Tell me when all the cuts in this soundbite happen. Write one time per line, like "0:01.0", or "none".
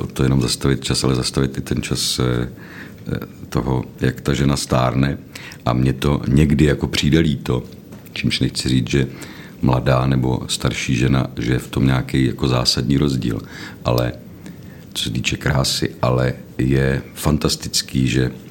none